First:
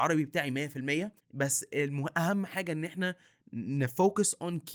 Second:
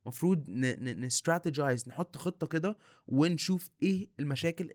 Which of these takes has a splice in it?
first; 1 cut; at 1.2 s

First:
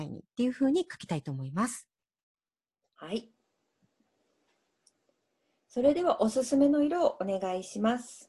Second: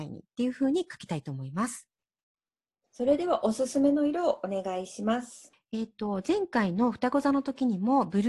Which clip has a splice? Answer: second; 2 cuts; at 2.9 s, 5.5 s

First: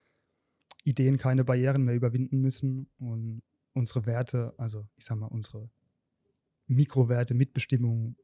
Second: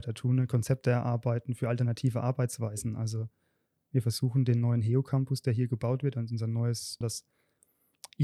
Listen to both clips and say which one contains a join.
second; 1 cut; at 7.0 s

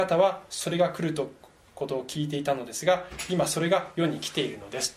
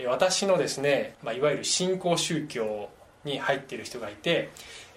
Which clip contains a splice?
second; 1 cut; at 1.1 s

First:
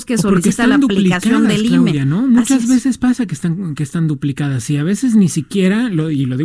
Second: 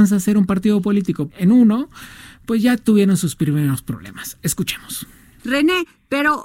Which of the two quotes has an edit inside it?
second; 1 cut; at 1.3 s

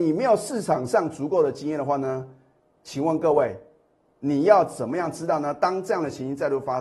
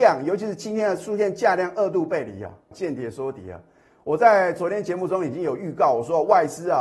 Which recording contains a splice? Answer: second; 1 cut; at 2.7 s

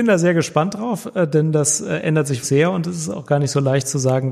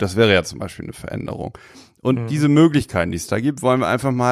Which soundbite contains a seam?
first; 1 cut; at 2.4 s

